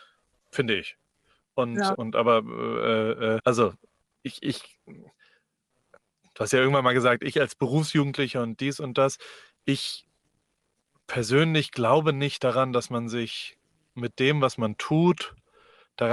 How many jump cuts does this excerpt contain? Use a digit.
2